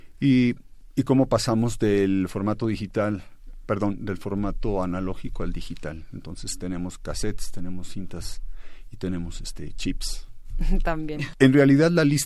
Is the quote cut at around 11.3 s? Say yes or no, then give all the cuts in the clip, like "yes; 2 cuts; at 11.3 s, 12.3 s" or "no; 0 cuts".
yes; 1 cut; at 11.3 s